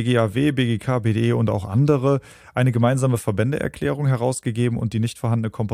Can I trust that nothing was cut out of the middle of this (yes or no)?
yes